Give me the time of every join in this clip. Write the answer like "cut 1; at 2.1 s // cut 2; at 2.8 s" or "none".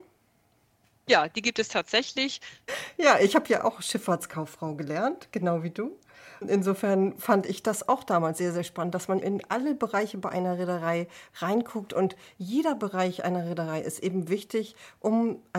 cut 1; at 2.7 s // cut 2; at 9.2 s